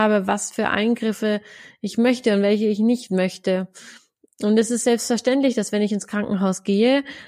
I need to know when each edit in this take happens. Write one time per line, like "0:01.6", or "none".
none